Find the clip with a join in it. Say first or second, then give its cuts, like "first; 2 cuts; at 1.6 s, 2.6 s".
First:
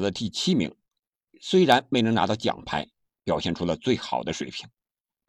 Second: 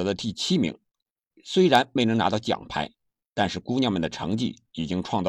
first; 1 cut; at 3.1 s